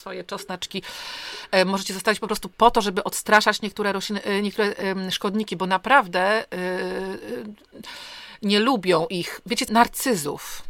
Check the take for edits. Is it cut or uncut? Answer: cut